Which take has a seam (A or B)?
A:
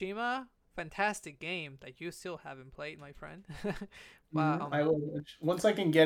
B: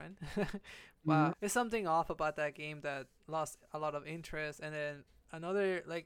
B